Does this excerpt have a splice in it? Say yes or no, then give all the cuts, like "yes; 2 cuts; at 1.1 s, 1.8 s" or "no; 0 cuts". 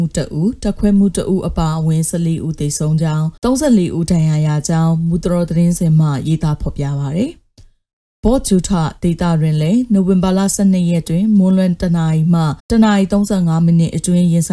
yes; 2 cuts; at 3.4 s, 12.6 s